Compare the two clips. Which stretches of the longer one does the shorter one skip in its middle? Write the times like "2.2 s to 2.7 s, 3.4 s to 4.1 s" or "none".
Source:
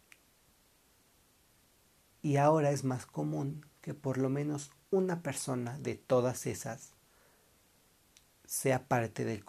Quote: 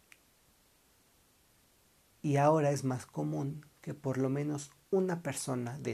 none